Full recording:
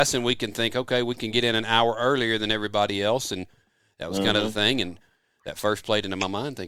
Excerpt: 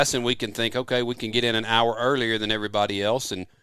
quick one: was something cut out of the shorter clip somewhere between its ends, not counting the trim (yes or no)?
no